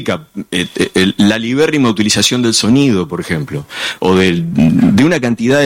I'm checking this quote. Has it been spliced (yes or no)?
yes